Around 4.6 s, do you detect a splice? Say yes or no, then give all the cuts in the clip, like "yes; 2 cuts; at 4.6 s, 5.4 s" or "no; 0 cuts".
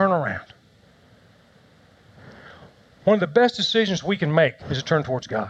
yes; 1 cut; at 4.6 s